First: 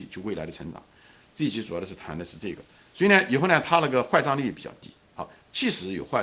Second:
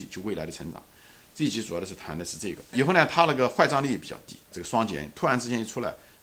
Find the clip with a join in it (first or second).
second